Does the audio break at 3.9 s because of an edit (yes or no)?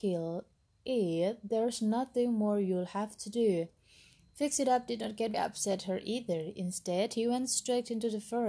no